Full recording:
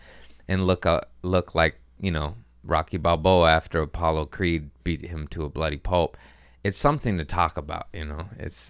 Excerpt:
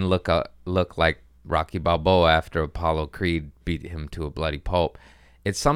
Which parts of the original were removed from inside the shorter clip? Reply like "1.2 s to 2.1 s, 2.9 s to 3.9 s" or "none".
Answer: 1.9 s to 2.5 s